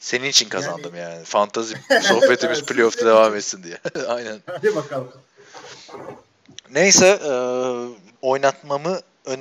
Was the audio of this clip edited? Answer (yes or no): yes